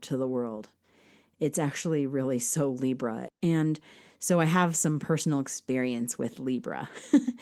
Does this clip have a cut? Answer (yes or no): yes